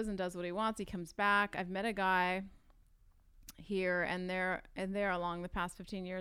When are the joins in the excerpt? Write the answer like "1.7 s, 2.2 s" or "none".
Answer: none